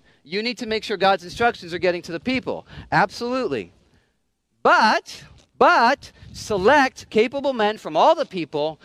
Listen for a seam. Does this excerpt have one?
yes; 1 cut; at 5.4 s

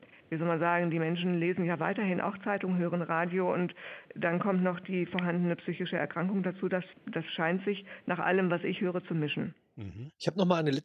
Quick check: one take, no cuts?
yes; 0 cuts

